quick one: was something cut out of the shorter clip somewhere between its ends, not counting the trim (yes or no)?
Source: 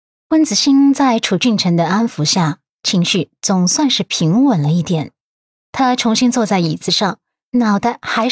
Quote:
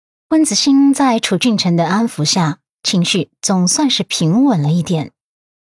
no